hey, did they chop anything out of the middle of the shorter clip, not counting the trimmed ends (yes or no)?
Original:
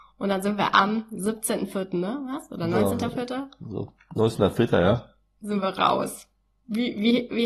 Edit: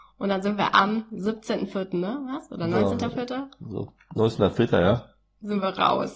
no